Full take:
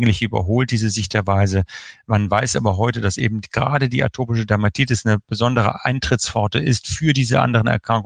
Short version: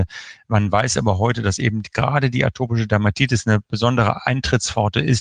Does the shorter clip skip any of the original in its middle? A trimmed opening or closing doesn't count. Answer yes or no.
no